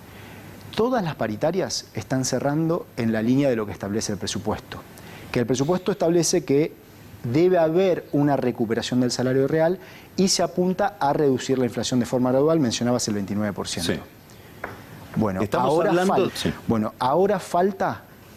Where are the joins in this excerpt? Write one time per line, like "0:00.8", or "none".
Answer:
0:16.3